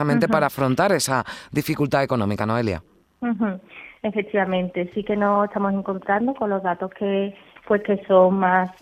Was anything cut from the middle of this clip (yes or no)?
yes